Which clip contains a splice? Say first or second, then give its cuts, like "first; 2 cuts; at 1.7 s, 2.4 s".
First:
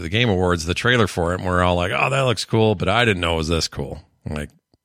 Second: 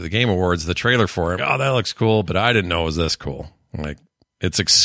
second; 1 cut; at 1.4 s